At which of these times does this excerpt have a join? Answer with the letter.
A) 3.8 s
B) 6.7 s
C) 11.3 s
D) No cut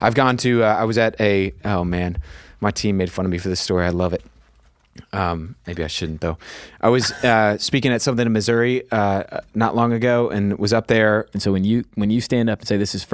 C